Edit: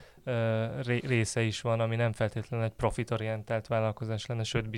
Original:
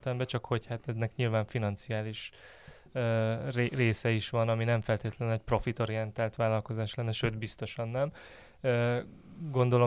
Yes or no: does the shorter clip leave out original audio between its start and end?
no